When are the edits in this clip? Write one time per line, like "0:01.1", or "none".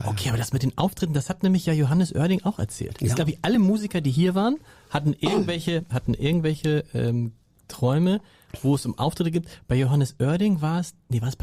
none